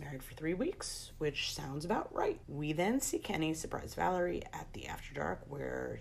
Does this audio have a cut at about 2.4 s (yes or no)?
yes